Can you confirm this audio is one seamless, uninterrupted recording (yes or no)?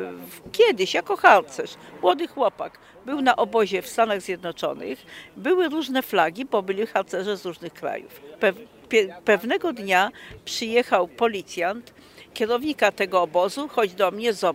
no